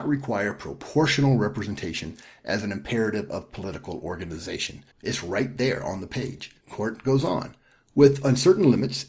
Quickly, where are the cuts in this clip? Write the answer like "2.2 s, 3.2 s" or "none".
4.9 s